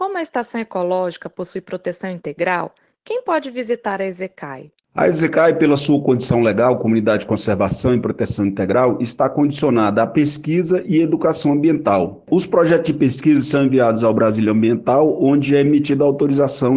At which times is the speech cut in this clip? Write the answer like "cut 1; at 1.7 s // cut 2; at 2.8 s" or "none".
cut 1; at 4.8 s